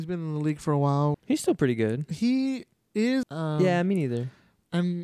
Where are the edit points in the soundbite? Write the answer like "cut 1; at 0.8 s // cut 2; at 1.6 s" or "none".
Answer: cut 1; at 1.1 s // cut 2; at 3.2 s